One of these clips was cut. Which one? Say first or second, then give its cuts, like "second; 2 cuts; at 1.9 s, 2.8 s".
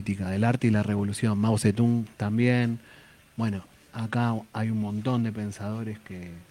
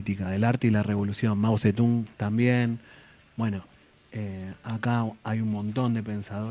first; 1 cut; at 3.9 s